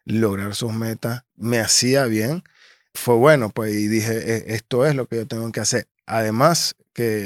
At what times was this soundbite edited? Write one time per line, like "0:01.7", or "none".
0:01.3
0:02.9